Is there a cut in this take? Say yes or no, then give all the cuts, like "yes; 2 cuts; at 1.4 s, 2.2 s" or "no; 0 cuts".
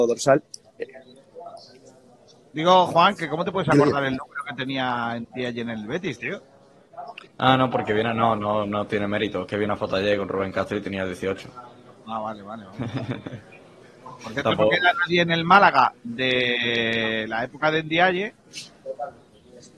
no; 0 cuts